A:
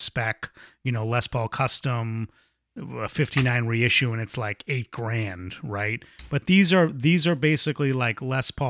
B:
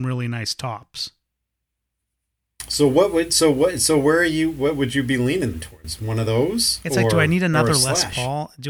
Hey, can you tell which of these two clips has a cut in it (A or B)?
B